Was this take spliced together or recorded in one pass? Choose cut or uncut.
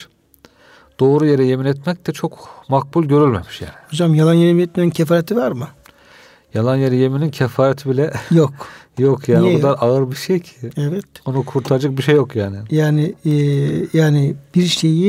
uncut